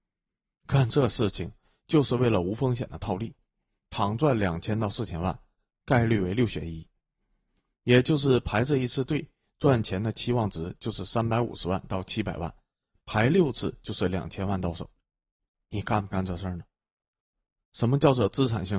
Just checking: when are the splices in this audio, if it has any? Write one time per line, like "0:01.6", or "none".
0:15.5

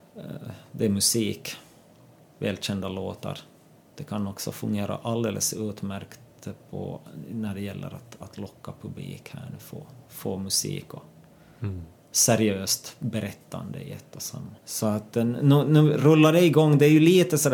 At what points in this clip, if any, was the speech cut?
0:14.6

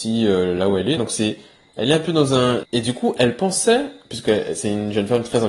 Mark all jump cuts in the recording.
0:01.0
0:02.6

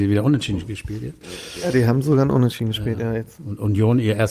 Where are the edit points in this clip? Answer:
none

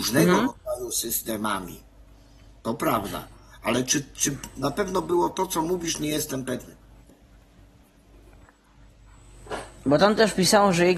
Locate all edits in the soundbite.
none

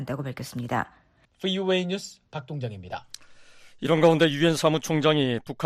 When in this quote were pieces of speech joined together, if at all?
0:01.3

